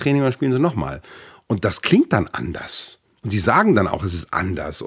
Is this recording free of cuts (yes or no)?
yes